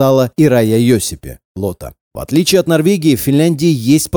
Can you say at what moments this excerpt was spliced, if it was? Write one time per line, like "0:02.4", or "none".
none